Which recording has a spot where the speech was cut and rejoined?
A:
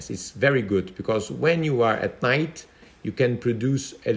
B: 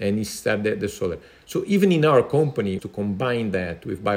B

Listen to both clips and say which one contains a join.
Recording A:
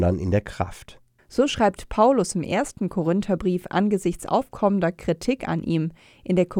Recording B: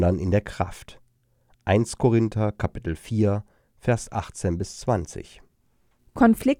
A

